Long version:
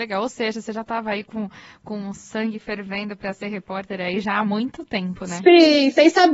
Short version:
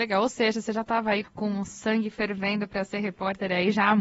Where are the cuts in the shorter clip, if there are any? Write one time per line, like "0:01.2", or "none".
0:01.2